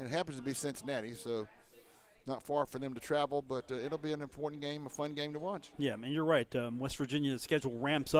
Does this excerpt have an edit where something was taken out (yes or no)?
no